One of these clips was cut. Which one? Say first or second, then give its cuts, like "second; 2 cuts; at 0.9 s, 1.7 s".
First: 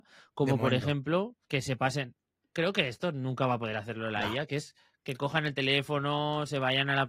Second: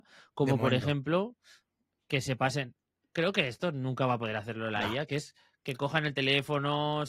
first; 1 cut; at 1.4 s